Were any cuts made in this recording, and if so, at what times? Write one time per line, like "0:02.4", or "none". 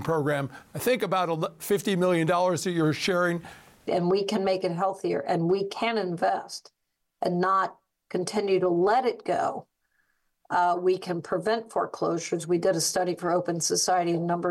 0:03.9